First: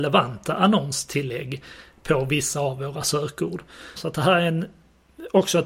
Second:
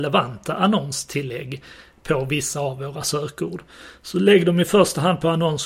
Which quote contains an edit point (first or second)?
first